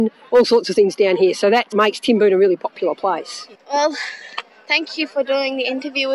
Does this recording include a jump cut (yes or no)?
yes